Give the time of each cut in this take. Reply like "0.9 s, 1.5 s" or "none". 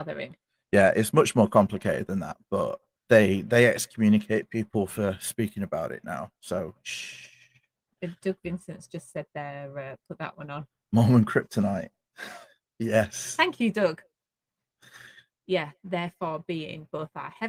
3.1 s, 15.3 s